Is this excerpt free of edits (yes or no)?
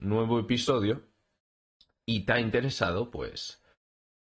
yes